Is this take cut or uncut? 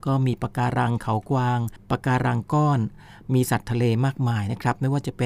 uncut